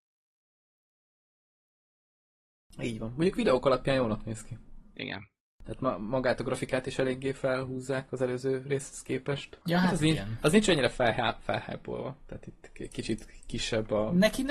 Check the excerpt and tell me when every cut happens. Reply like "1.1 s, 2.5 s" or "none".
9.6 s